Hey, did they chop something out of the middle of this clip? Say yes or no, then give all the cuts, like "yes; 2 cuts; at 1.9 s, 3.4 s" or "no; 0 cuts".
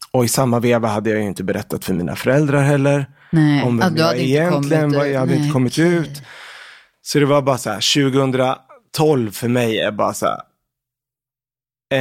no; 0 cuts